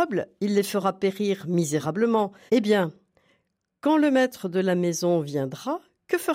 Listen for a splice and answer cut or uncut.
cut